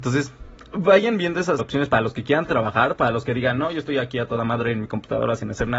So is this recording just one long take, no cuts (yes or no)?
no